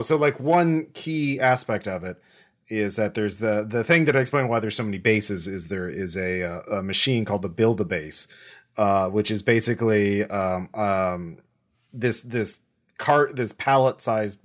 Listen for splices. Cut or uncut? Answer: uncut